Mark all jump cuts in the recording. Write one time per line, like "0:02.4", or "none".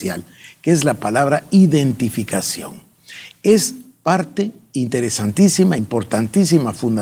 none